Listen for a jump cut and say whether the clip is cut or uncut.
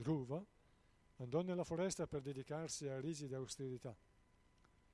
cut